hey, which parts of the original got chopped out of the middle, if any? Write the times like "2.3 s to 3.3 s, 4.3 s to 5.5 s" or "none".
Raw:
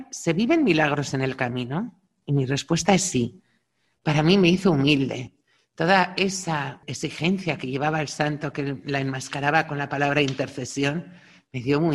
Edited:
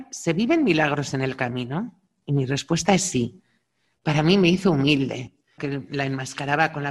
5.6 s to 8.5 s